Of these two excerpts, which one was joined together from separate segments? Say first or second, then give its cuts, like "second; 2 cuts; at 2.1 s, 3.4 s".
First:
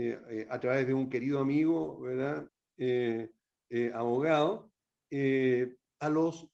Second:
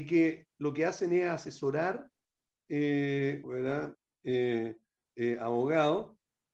second; 1 cut; at 3.4 s